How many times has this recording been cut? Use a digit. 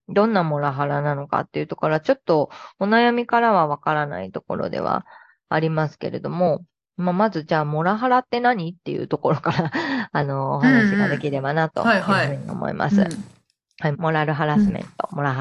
1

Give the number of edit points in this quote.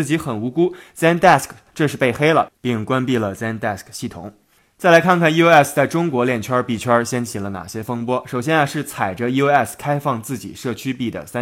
0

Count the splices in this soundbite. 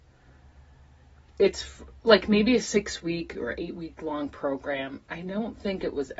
0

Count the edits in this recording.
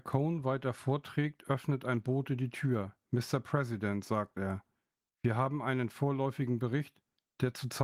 0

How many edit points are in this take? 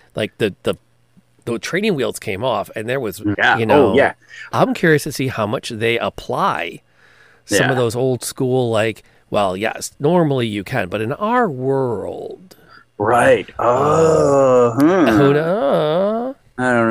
2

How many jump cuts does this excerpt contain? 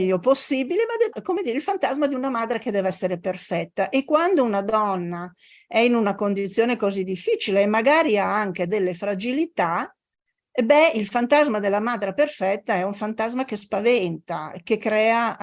1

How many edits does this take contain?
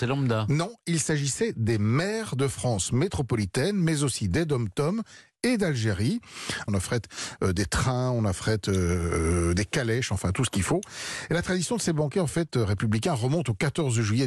1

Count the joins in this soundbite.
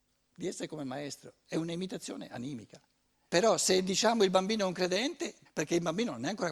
2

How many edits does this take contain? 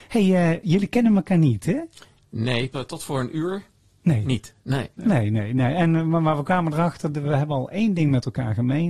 1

